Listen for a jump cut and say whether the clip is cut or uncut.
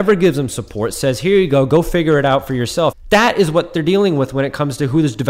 cut